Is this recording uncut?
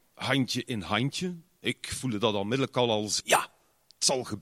no; 1 cut; at 3.2 s

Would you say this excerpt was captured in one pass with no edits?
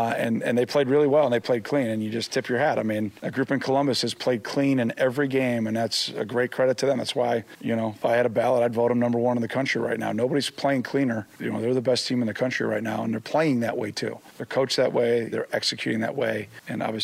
no; 1 cut; at 15.3 s

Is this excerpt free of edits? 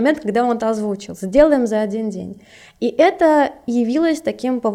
yes; 0 cuts

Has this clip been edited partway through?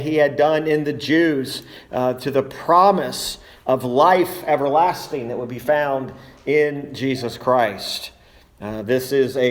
no; 0 cuts

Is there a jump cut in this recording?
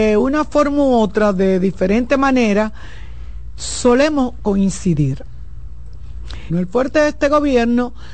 yes; 1 cut; at 6.5 s

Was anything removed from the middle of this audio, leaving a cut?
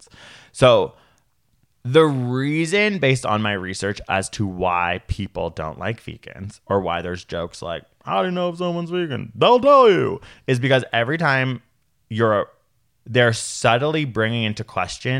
yes; 1 cut; at 13.0 s

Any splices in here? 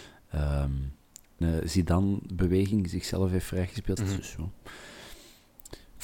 yes; 2 cuts; at 1.4 s, 4.0 s

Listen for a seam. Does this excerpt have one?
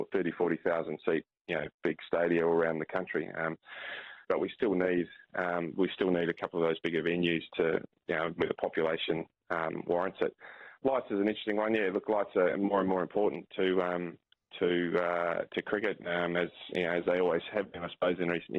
yes; 1 cut; at 4.3 s

